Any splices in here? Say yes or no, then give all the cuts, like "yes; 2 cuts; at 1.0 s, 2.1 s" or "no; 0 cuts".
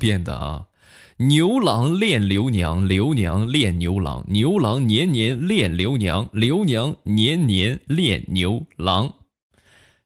no; 0 cuts